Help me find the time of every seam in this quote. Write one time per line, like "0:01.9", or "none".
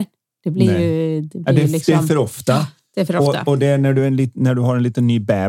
none